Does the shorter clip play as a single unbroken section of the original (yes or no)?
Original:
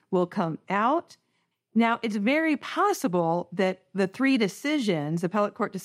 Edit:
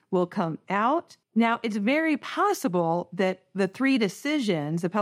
no